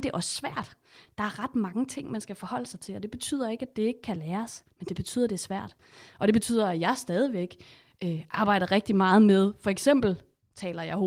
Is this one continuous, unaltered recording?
yes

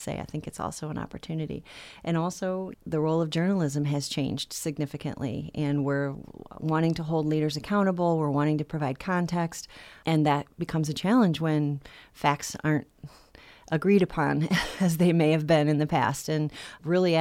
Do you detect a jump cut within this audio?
no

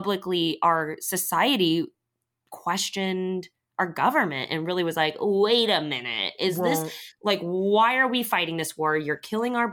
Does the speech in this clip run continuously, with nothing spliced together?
yes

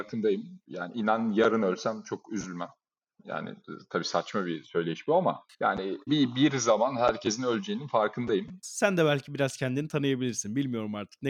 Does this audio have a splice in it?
yes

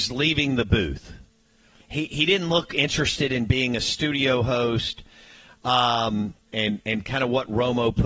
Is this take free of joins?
no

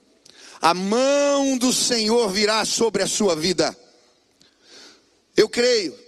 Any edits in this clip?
no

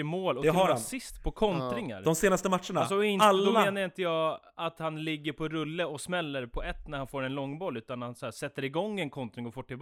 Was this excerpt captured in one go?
yes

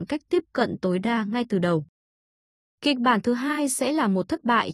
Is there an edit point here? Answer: no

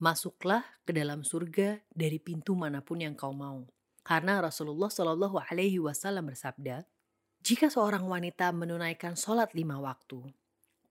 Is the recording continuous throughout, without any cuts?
no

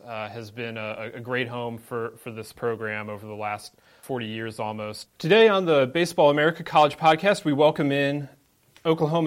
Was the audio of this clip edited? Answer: yes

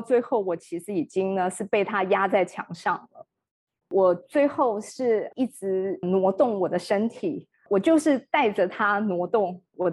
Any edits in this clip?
no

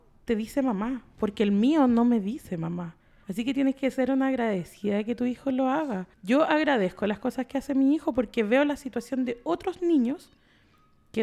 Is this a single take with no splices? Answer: no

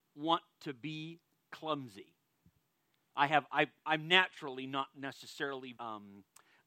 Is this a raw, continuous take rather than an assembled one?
no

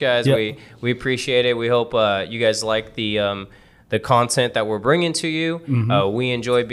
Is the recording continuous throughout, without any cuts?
yes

